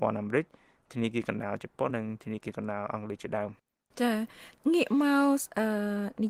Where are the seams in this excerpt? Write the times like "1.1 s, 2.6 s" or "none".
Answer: 1.9 s